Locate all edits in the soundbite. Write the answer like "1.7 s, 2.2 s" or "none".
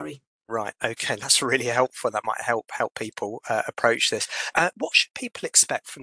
4.5 s